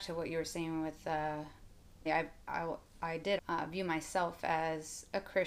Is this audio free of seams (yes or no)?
no